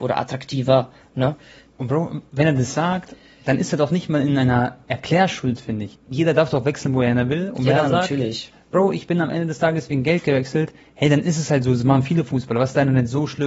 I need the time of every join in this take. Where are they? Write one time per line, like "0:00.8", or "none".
0:05.9